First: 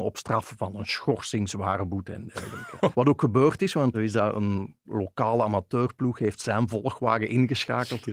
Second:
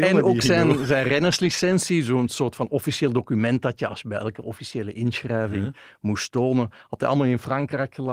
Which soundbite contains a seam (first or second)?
first